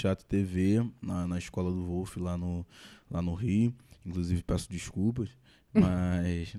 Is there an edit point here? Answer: no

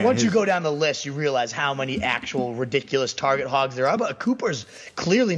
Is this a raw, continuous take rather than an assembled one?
yes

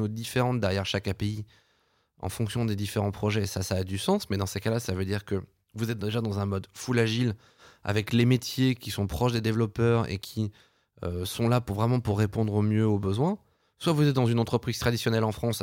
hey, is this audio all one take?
yes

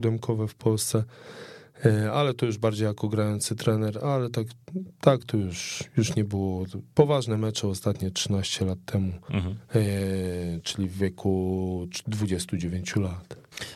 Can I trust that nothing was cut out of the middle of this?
yes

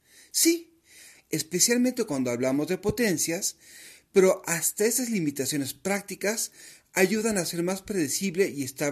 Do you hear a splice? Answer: yes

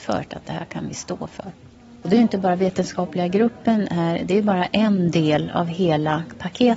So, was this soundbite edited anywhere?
no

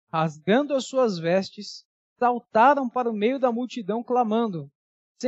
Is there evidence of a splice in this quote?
no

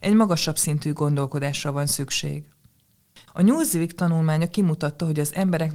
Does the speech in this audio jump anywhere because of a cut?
yes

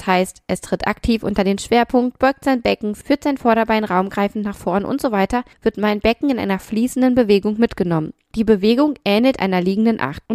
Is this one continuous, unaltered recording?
yes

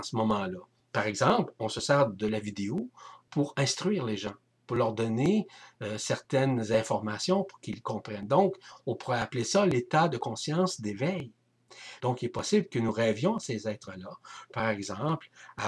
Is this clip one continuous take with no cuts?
no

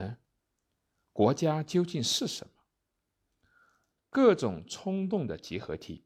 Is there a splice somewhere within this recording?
yes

